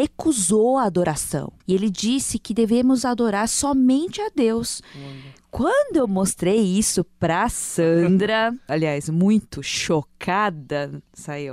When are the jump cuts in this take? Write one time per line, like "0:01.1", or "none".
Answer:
0:01.6
0:08.7